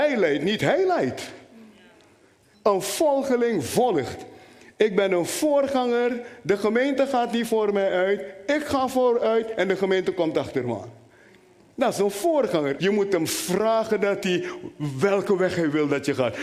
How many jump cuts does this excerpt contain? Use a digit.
2